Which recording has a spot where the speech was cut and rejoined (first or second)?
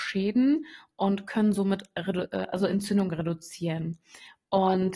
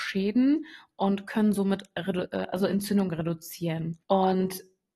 second